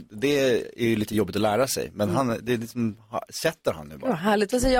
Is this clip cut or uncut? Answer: uncut